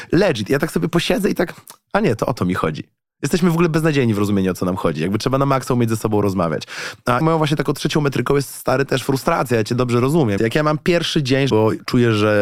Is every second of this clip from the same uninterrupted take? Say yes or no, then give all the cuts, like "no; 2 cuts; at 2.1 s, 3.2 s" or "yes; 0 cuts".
no; 3 cuts; at 7.2 s, 10.4 s, 11.5 s